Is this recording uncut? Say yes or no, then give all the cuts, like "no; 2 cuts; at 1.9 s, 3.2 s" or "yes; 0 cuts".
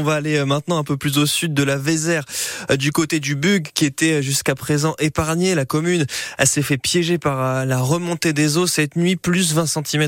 yes; 0 cuts